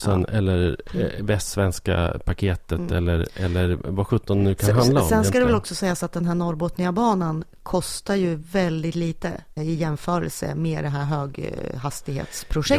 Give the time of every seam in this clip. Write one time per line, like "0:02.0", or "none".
0:09.6